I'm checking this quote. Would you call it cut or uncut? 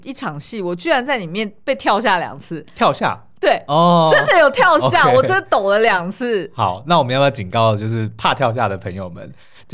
uncut